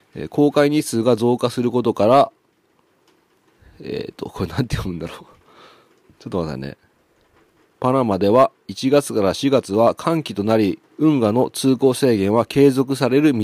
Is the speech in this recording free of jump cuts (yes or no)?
no